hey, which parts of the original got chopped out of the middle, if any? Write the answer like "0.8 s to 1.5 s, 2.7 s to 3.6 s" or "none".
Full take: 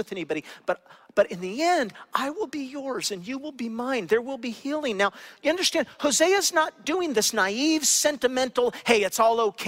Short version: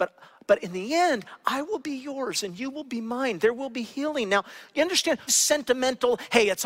5.9 s to 7.8 s